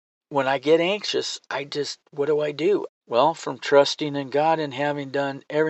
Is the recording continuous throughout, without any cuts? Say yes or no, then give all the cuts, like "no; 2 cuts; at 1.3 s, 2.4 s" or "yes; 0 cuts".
no; 1 cut; at 2.9 s